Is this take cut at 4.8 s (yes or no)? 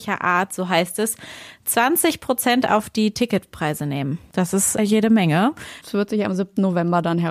yes